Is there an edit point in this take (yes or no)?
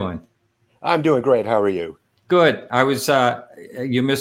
no